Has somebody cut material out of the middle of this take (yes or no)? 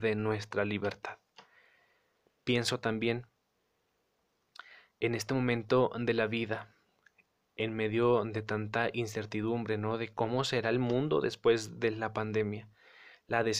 no